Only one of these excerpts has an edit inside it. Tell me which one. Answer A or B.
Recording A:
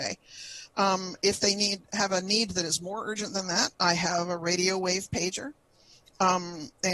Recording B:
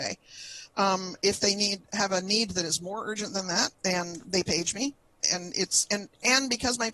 B